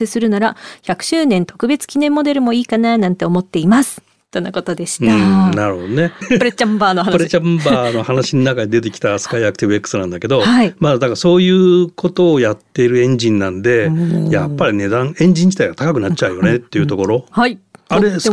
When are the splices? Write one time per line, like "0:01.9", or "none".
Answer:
0:06.2
0:17.3